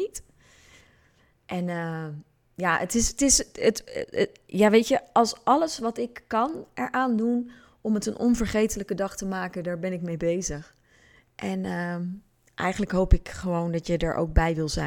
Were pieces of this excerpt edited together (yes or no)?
no